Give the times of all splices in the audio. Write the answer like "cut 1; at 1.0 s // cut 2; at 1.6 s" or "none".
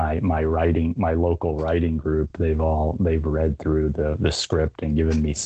none

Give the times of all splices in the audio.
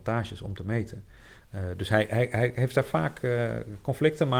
cut 1; at 1.4 s

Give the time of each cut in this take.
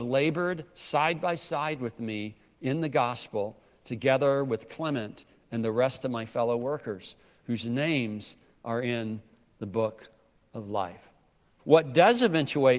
cut 1; at 11.6 s

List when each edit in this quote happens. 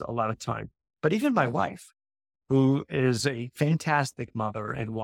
none

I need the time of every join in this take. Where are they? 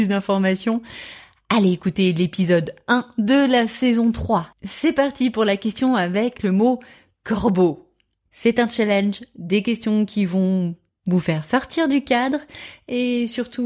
cut 1; at 4.5 s // cut 2; at 8.3 s

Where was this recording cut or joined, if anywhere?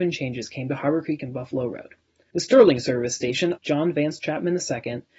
cut 1; at 2.3 s // cut 2; at 3.6 s

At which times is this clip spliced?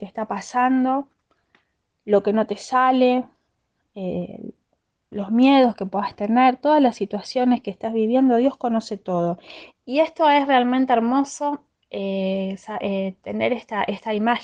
cut 1; at 9.7 s

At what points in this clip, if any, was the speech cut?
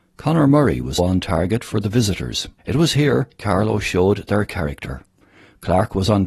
cut 1; at 1.0 s // cut 2; at 2.6 s

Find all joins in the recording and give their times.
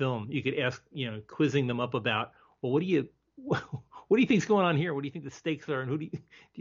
none

